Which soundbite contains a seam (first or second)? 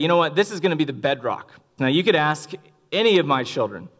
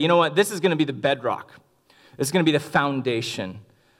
first